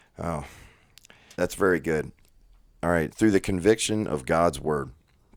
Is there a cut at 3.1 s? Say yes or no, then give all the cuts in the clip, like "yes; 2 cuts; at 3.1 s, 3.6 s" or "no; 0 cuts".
yes; 2 cuts; at 1.3 s, 3.1 s